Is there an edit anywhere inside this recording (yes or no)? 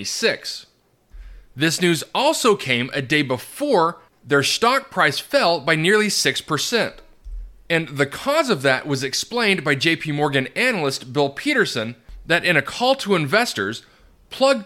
no